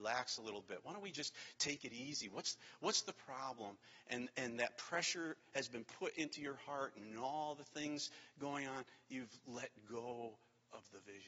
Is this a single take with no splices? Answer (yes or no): yes